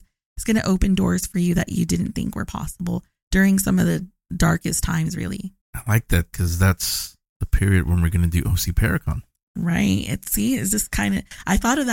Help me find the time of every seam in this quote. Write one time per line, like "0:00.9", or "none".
0:05.6

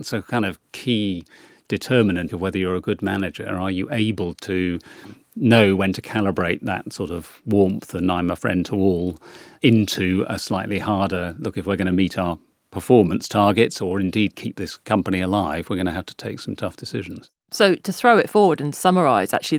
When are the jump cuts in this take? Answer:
0:02.3

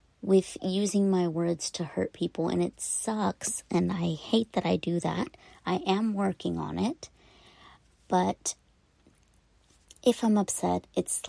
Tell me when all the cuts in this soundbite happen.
none

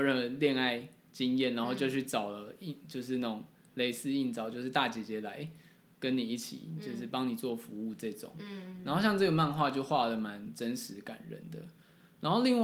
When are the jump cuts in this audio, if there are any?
none

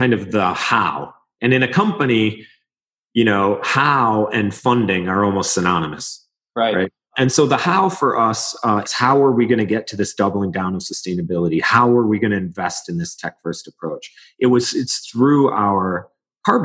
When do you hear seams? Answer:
0:08.8

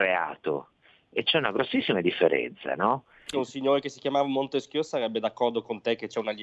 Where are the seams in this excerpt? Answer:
0:03.3

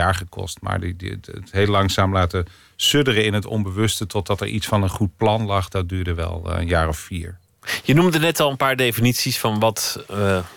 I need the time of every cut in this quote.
0:01.2

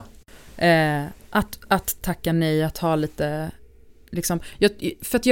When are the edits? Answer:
none

